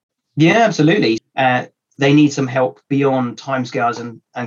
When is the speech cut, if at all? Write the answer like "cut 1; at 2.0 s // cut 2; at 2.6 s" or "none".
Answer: cut 1; at 1.2 s